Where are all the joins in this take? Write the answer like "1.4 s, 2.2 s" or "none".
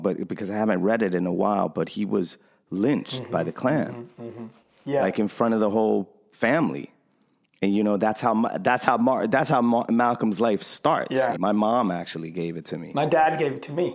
11.4 s